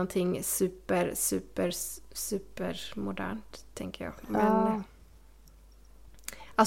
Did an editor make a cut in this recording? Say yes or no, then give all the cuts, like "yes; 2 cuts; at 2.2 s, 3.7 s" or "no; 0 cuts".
no; 0 cuts